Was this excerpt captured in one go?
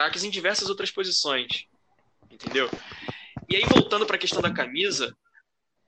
yes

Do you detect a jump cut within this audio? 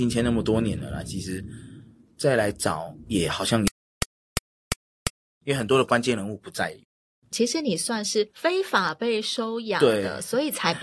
no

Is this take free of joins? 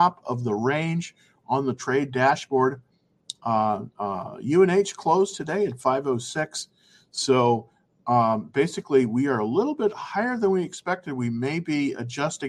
yes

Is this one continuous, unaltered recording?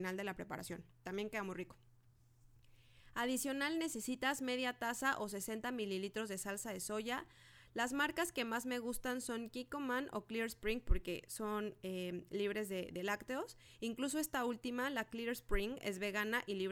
yes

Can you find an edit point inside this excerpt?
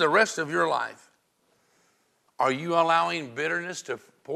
yes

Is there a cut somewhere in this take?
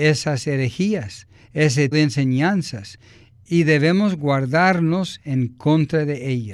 yes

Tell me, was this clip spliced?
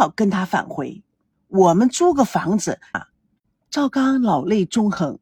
yes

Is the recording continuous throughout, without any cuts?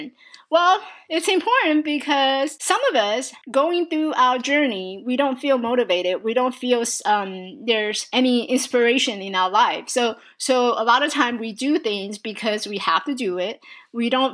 yes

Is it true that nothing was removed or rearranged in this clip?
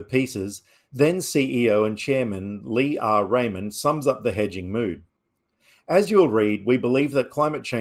yes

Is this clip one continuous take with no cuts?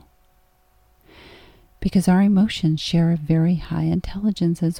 yes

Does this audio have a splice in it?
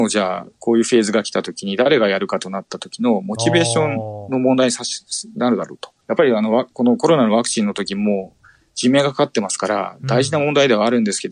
yes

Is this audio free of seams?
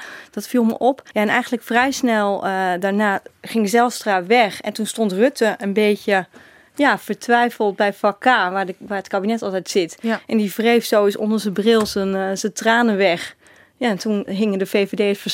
no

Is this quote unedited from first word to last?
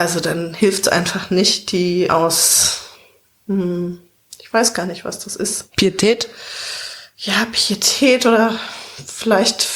yes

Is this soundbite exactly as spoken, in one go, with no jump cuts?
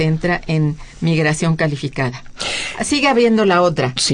yes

